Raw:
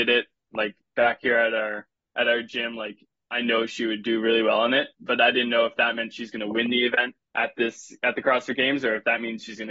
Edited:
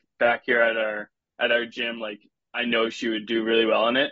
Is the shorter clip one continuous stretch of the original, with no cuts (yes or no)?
yes